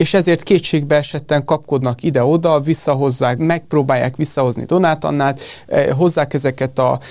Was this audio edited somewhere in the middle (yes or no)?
yes